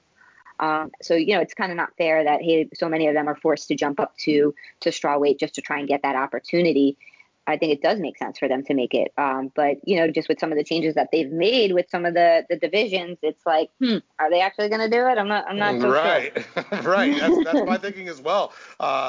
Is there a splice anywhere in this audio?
no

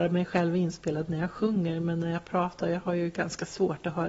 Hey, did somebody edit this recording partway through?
no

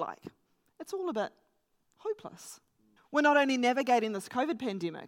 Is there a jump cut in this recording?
yes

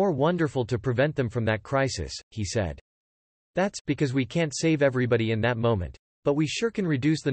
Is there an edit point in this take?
no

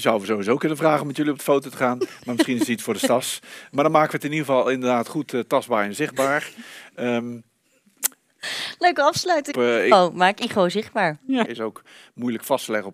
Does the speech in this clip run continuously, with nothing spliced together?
no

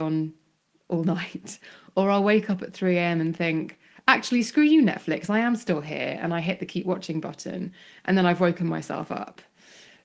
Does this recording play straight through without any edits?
yes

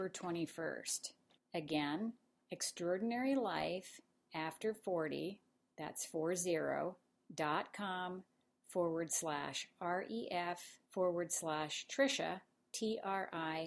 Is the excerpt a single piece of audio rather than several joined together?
no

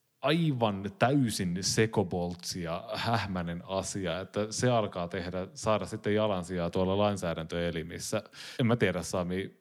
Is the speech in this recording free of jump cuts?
yes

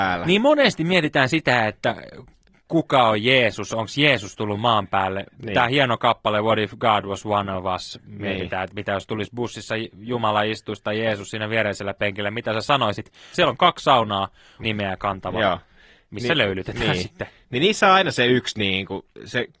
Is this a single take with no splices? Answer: no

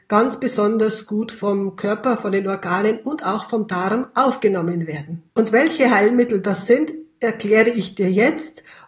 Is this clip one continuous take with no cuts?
no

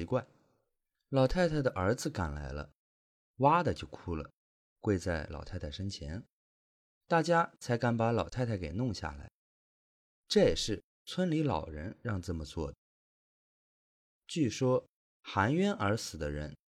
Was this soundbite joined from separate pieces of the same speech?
no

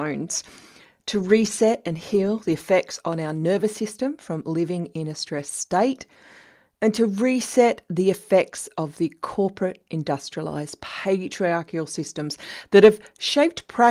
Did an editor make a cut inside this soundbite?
yes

